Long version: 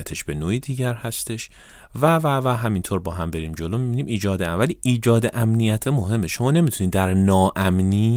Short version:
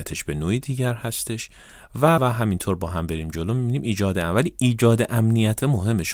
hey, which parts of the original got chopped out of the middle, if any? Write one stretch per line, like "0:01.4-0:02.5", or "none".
0:02.2-0:02.4